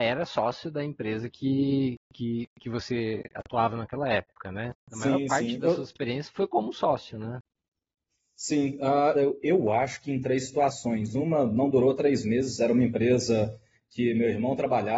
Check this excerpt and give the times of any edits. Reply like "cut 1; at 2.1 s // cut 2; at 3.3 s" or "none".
cut 1; at 4.8 s // cut 2; at 9.1 s